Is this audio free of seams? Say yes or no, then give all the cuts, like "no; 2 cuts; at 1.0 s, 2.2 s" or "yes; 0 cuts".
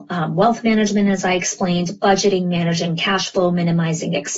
yes; 0 cuts